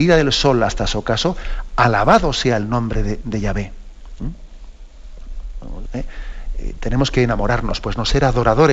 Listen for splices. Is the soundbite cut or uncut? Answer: cut